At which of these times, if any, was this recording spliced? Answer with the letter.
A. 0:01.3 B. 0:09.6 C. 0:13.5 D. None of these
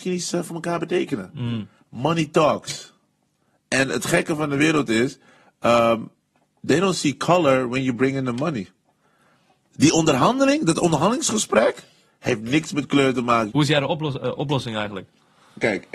C